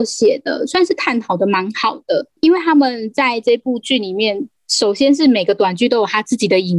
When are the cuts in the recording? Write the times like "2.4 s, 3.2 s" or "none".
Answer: none